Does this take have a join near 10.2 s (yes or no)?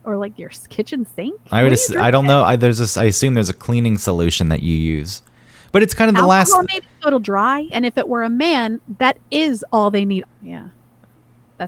yes